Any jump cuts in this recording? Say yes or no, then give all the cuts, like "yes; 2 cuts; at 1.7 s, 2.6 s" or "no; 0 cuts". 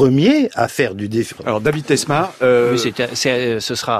yes; 1 cut; at 1.4 s